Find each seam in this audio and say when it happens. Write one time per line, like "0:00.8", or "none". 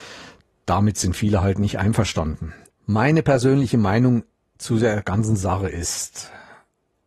0:02.7

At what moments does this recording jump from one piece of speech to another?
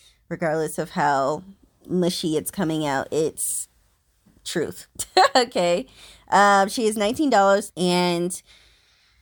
0:07.7

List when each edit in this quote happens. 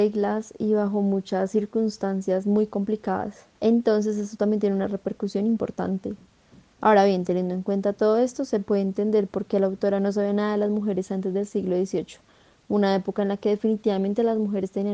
0:03.6

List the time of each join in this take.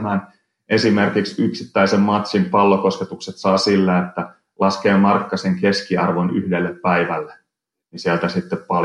none

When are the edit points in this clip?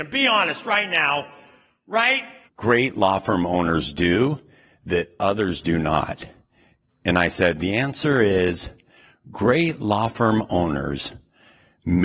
0:02.4

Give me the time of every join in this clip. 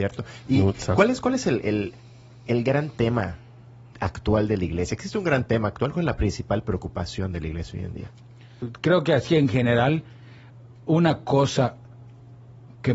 none

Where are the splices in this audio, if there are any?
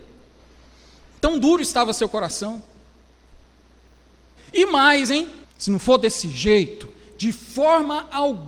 0:04.4
0:05.4

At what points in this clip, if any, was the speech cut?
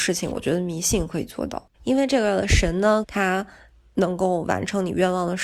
0:01.7
0:03.0

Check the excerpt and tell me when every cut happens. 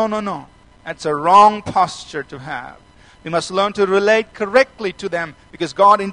none

